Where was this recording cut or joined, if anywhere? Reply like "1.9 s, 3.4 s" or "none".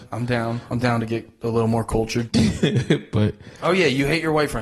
3.6 s